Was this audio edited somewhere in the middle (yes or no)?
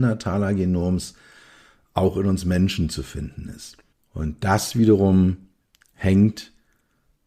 yes